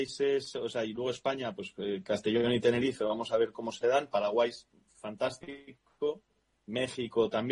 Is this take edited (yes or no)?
no